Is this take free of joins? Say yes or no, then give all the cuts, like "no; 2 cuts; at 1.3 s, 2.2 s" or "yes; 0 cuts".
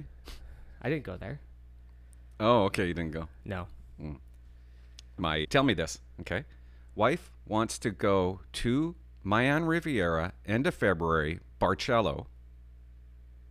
no; 1 cut; at 5.4 s